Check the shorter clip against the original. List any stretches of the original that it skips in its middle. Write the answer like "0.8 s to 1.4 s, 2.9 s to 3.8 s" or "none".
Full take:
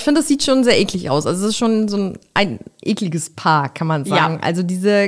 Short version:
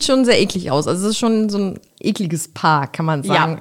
2.3 s to 2.7 s